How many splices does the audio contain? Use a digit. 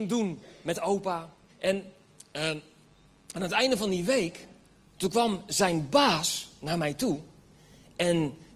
1